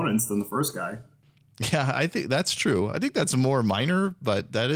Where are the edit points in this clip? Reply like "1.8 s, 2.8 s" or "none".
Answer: none